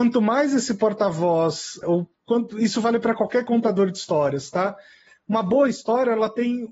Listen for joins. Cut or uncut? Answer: cut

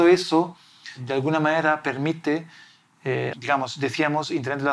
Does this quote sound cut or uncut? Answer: cut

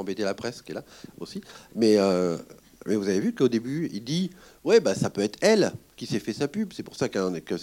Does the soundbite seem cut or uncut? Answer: uncut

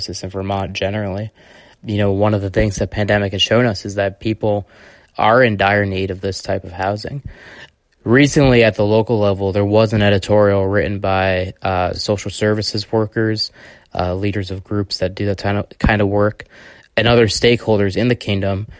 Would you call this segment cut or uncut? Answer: uncut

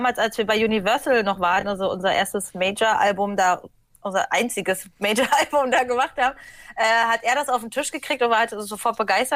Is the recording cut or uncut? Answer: uncut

